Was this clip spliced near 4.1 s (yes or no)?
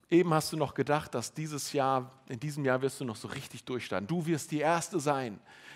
yes